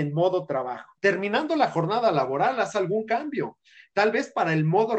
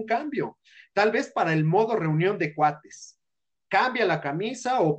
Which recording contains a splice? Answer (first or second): first